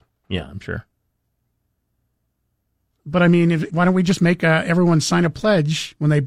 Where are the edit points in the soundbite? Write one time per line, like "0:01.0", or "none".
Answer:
0:03.7

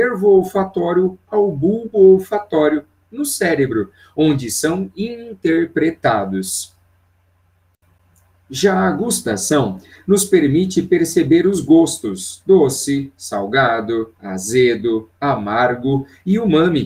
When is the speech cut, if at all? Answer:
none

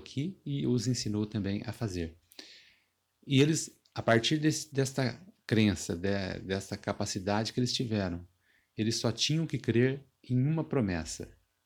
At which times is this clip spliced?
none

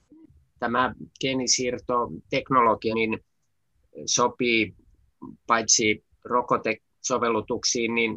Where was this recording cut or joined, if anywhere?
0:02.9
0:06.1

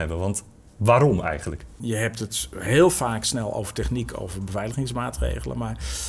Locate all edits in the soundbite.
0:01.8

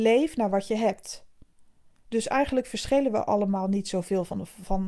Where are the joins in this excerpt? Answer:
none

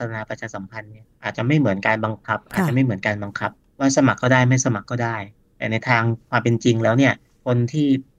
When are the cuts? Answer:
0:02.5

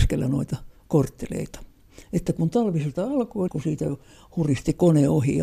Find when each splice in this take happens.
0:03.5

